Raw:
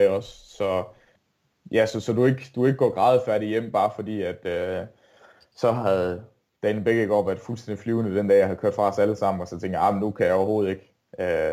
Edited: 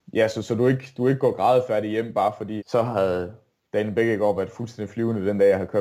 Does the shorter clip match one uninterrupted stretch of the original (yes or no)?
no